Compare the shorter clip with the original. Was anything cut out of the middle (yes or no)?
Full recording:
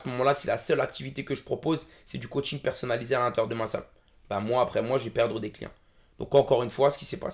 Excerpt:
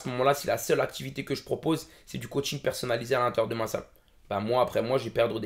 no